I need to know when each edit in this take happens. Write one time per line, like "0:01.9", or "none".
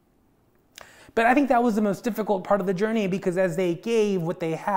0:01.0